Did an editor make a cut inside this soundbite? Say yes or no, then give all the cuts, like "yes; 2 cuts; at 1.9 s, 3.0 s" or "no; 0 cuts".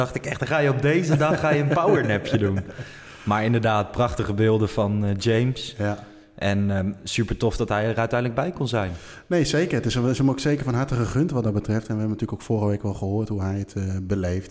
no; 0 cuts